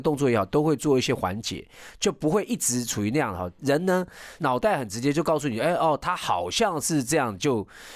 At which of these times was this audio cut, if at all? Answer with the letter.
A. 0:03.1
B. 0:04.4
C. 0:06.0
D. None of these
B